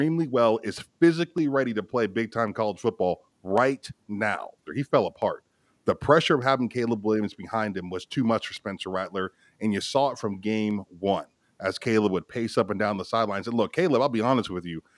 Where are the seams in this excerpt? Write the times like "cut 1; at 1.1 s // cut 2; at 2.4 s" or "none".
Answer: cut 1; at 4.7 s

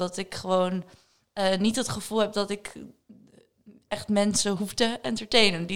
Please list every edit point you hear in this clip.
none

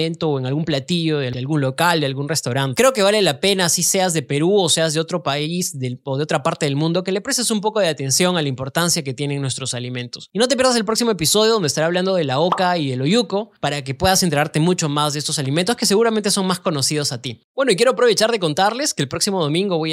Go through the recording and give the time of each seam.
cut 1; at 2.7 s

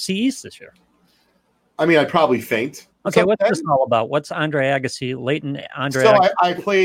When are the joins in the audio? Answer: cut 1; at 2.9 s

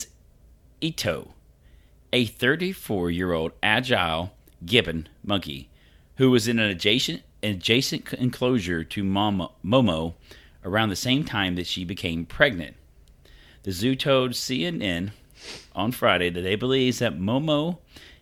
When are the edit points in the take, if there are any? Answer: none

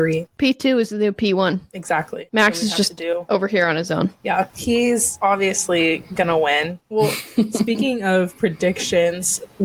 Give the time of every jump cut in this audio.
cut 1; at 6.8 s

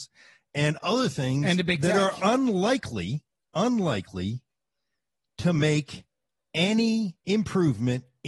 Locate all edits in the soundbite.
cut 1; at 7.2 s

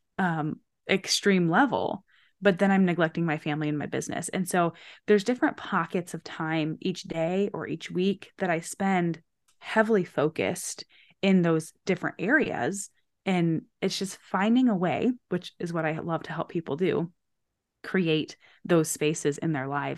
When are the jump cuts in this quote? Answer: cut 1; at 13.2 s

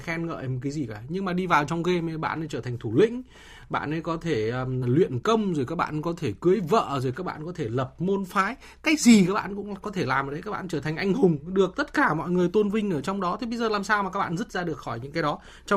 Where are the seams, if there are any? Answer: cut 1; at 4.8 s

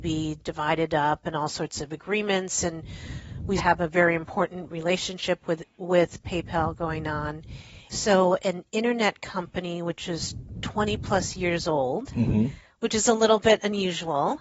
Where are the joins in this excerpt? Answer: cut 1; at 3.6 s // cut 2; at 7.9 s

